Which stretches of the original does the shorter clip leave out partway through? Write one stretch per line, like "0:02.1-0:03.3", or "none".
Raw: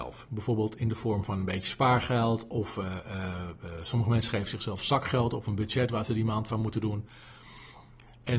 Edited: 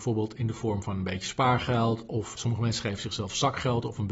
0:02.8-0:03.8